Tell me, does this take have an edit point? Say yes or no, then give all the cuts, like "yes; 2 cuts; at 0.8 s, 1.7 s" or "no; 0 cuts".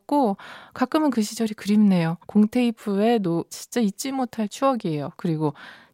yes; 2 cuts; at 2.2 s, 3.5 s